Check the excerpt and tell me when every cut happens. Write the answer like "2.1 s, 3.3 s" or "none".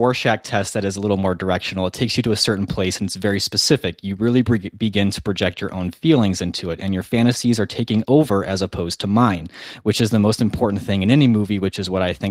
none